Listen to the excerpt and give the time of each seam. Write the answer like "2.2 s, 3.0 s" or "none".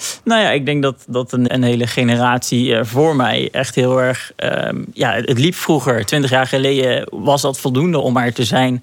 1.5 s